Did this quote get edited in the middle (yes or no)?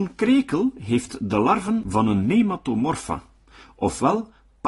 no